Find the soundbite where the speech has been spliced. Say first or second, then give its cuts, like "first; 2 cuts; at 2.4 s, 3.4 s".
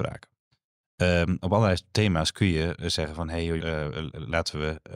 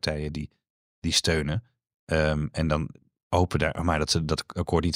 first; 1 cut; at 3.6 s